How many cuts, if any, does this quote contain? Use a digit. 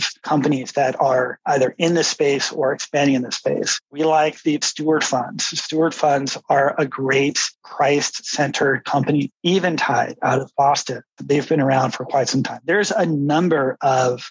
1